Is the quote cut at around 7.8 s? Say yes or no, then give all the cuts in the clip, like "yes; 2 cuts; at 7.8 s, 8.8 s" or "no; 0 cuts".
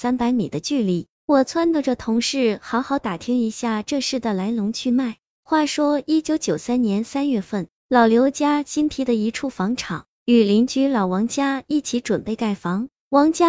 no; 0 cuts